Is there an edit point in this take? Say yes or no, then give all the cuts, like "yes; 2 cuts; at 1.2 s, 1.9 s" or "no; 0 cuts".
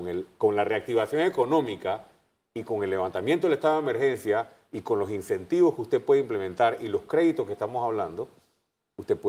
no; 0 cuts